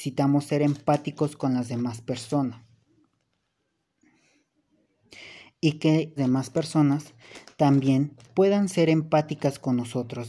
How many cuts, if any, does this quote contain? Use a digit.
2